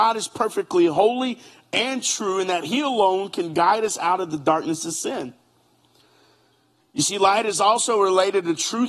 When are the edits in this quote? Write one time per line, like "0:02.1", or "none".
none